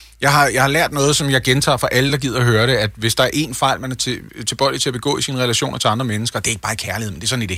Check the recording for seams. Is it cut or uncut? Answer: uncut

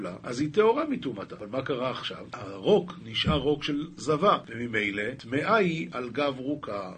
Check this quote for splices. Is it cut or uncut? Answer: cut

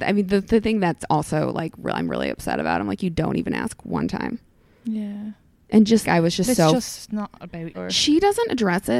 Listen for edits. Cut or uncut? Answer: cut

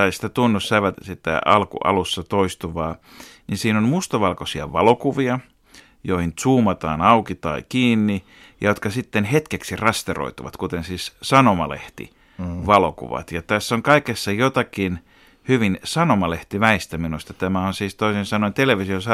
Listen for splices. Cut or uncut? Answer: cut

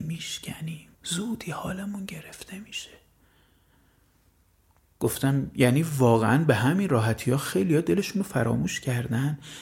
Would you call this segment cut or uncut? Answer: cut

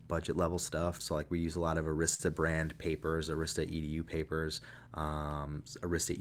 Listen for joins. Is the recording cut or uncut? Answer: cut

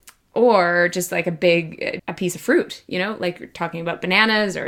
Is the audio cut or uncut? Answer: cut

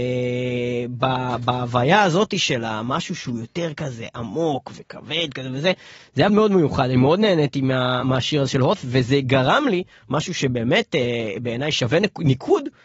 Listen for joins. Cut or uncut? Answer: cut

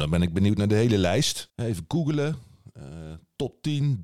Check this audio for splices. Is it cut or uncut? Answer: uncut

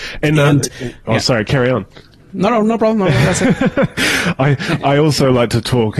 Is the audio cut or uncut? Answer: uncut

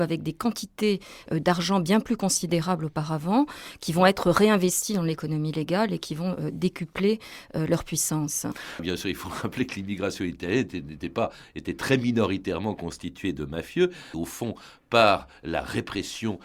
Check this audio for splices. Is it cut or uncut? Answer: cut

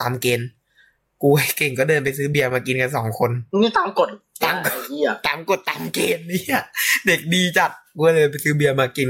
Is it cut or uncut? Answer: cut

